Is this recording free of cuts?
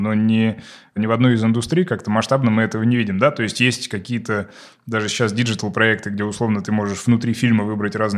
yes; 0 cuts

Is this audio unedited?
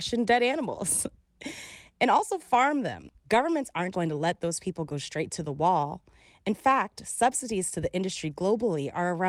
no; 1 cut; at 3.9 s

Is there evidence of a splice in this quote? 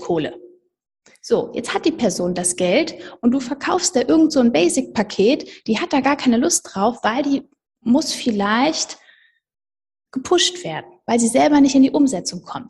no; 0 cuts

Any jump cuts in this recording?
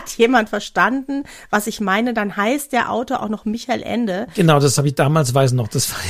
no; 0 cuts

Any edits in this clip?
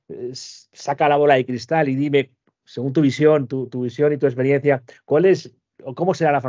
no; 0 cuts

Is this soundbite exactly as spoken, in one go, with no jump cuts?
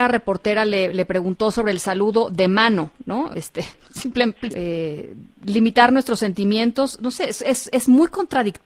no; 2 cuts; at 3.3 s, 4.5 s

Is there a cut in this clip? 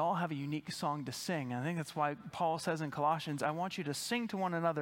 no; 0 cuts

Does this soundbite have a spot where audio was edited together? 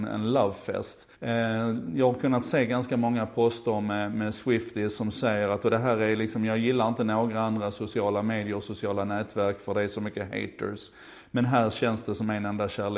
yes; 1 cut; at 1.1 s

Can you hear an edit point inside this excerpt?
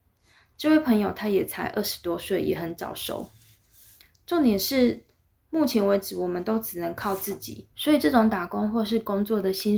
yes; 1 cut; at 7.7 s

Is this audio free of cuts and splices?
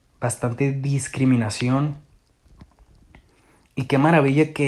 yes; 0 cuts

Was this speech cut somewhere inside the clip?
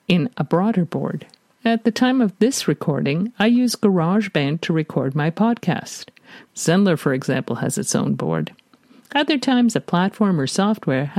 yes; 1 cut; at 6.5 s

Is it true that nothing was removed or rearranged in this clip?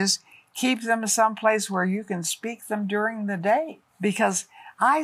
no; 1 cut; at 3.9 s

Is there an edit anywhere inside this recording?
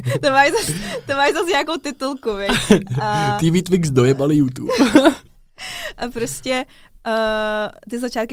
no; 0 cuts

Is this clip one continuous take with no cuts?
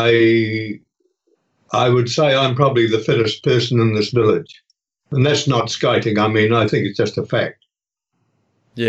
yes; 0 cuts

